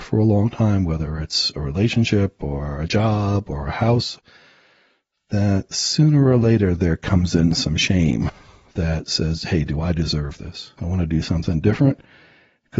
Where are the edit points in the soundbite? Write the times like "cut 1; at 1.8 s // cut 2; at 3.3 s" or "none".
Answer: cut 1; at 10.8 s